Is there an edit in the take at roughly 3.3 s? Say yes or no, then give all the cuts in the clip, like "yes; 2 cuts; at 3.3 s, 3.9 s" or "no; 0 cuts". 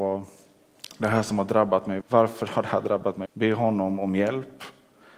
yes; 2 cuts; at 2.0 s, 3.3 s